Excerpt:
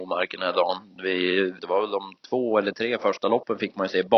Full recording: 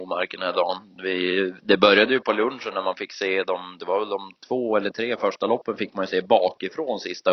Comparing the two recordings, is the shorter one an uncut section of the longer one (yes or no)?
no